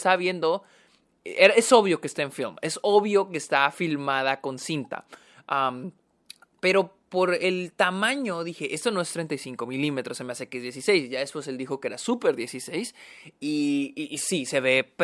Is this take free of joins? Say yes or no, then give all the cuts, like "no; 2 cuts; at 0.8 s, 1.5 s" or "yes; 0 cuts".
yes; 0 cuts